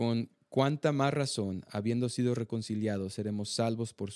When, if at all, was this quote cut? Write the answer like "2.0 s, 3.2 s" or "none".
none